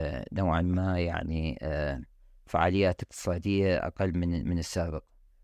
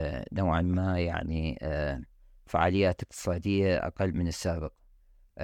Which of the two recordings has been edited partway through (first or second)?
second